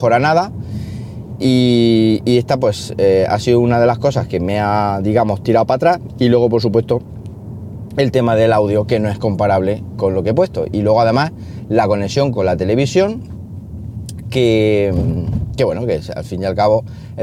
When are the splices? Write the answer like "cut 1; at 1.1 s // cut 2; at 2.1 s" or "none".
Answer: none